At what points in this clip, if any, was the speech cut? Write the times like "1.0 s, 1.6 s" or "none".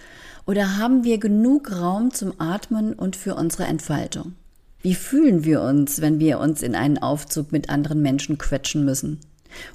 4.8 s